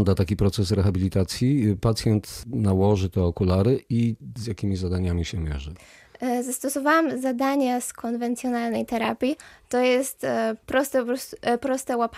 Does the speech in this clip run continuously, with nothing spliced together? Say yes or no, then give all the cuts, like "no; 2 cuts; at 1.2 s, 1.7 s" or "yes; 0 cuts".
yes; 0 cuts